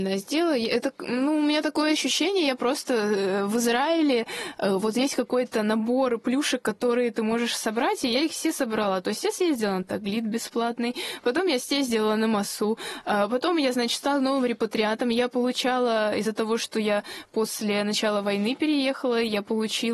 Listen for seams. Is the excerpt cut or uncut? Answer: uncut